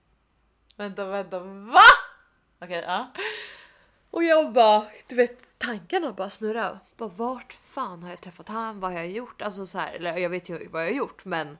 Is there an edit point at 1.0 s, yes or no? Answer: no